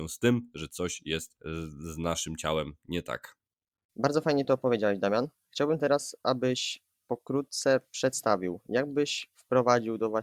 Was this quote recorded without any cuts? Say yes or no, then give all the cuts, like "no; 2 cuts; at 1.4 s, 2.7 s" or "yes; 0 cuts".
yes; 0 cuts